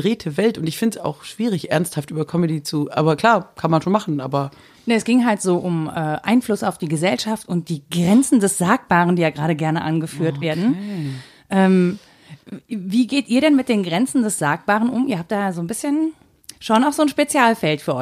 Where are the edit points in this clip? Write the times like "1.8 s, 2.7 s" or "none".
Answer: none

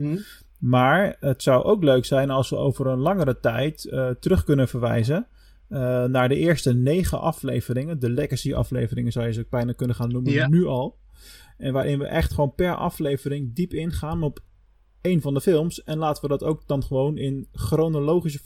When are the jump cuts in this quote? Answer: none

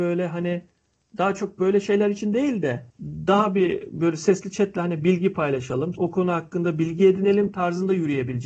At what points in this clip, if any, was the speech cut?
2.9 s, 6.0 s

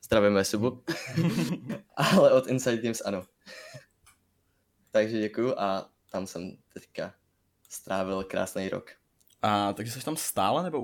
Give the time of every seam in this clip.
6.0 s

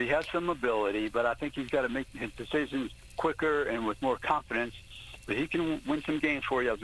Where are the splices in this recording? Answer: none

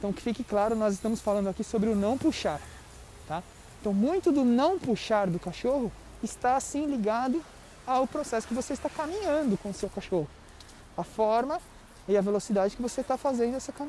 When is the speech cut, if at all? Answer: none

